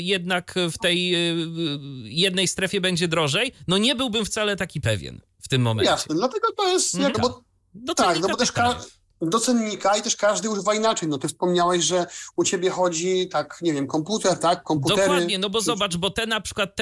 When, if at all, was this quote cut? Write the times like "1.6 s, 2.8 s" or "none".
7.1 s